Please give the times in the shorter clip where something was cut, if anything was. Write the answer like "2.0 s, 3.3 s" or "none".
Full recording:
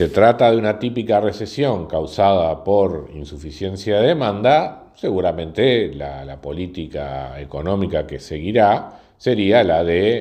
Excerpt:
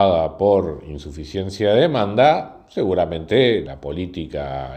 3.7 s